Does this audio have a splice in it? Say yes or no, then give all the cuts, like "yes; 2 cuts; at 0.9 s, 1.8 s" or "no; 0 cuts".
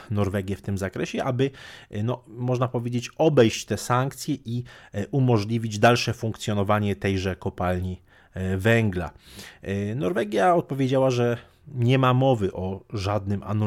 no; 0 cuts